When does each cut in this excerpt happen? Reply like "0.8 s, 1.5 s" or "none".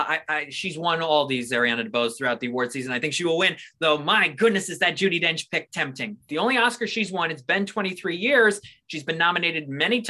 6.2 s